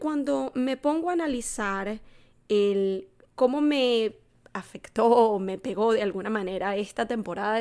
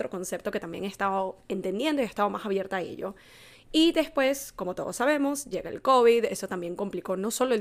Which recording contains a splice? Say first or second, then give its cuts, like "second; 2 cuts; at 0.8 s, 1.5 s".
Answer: second; 2 cuts; at 3.5 s, 5.5 s